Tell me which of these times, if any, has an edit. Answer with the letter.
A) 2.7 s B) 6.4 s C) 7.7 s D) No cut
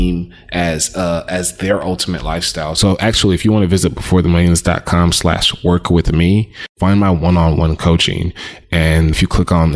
A